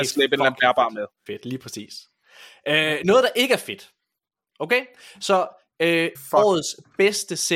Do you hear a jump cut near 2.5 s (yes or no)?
no